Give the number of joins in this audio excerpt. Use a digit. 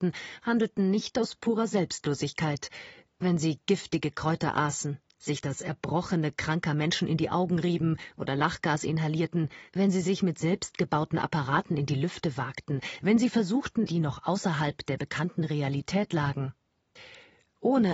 2